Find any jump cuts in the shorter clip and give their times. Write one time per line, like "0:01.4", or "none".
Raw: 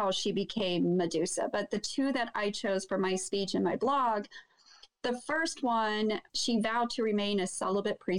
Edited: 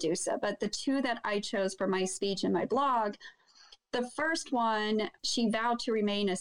none